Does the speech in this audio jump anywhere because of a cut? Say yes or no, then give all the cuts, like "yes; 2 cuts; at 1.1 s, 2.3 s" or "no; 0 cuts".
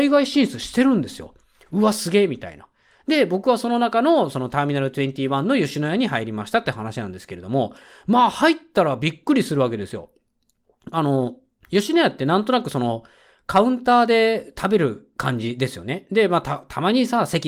no; 0 cuts